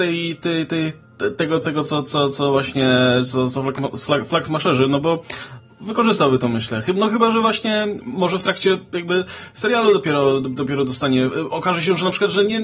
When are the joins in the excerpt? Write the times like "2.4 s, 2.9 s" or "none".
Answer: 1.6 s